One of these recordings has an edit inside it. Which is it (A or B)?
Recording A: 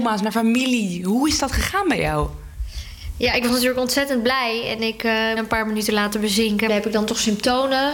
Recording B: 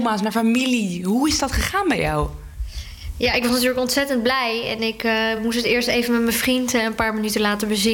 A